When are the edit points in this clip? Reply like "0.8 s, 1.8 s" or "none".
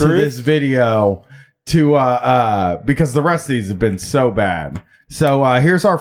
none